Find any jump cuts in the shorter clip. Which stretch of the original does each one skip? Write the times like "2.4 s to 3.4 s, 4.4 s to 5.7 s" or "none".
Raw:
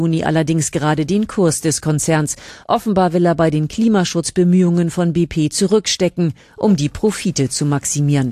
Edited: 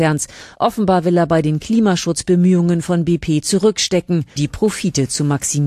6.4 s to 6.8 s